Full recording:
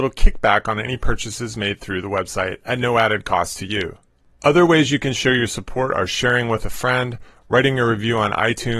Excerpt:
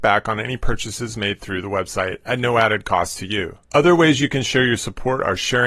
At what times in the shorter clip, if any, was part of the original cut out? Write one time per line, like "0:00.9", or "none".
0:03.6